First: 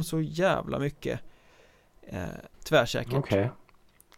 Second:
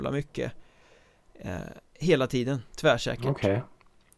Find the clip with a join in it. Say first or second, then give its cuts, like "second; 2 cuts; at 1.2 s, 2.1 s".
first; 1 cut; at 2.5 s